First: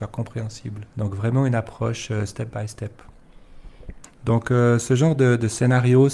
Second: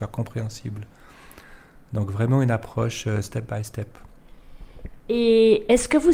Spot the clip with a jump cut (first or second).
first